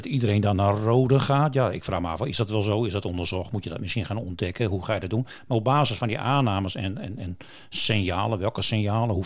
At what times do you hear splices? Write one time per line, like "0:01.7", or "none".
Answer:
none

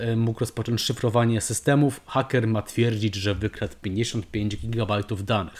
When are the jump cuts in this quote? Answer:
none

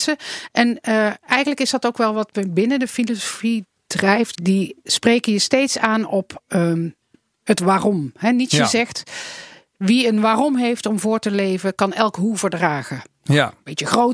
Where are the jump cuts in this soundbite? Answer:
0:04.3

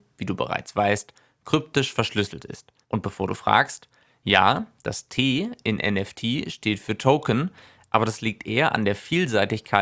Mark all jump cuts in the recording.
0:02.8

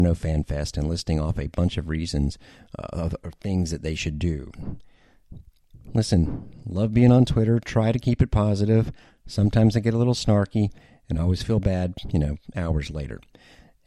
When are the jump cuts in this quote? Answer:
0:05.8

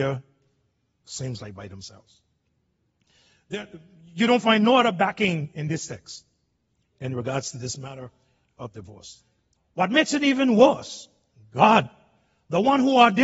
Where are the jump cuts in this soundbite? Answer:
0:09.6

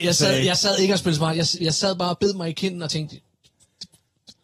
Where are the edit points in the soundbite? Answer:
none

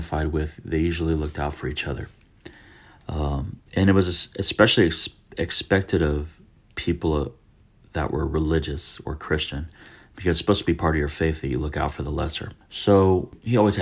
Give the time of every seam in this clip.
0:03.7

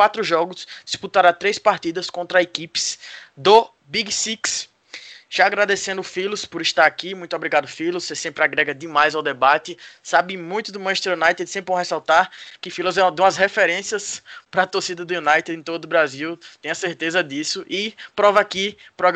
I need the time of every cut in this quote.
none

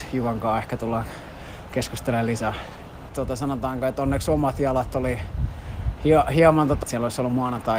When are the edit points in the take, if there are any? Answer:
0:03.1
0:06.8

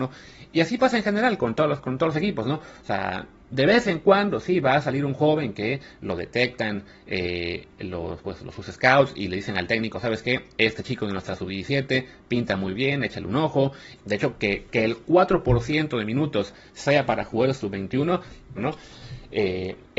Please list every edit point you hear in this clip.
0:14.0
0:18.6

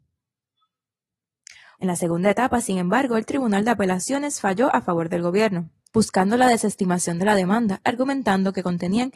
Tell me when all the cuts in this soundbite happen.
0:01.8
0:05.9
0:07.8

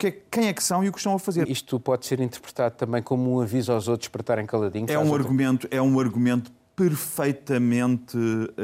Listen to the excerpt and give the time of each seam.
0:01.4

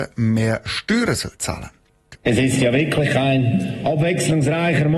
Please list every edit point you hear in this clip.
0:02.1

